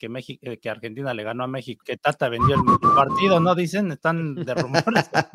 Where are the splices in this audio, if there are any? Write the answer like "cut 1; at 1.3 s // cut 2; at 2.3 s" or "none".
cut 1; at 1.8 s